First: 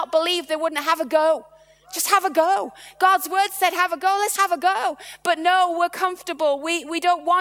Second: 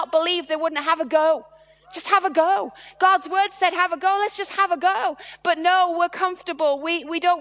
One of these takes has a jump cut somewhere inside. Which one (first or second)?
first